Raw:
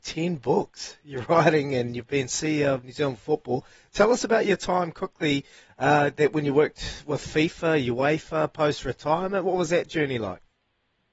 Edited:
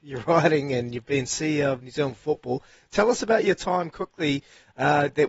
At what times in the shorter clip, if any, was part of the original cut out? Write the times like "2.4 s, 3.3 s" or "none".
none